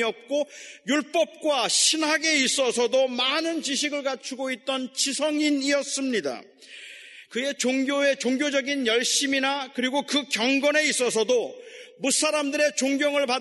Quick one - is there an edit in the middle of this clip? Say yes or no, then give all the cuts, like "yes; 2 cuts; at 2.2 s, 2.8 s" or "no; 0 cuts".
yes; 1 cut; at 7.3 s